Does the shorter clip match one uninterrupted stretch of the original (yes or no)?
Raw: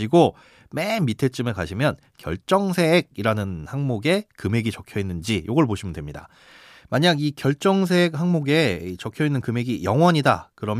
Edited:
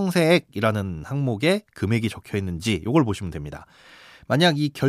yes